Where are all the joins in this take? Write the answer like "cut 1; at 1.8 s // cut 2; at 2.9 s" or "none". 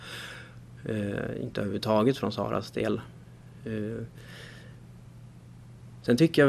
none